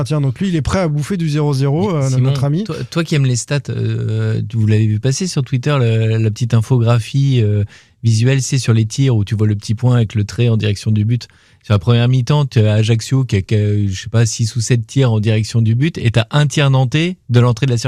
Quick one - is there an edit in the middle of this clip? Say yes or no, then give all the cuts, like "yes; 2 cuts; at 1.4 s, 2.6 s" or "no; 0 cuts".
no; 0 cuts